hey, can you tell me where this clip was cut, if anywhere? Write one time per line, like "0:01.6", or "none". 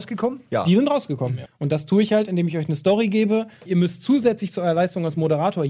0:01.4
0:03.7